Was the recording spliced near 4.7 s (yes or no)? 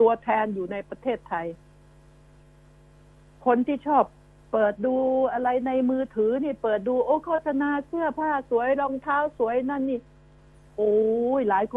yes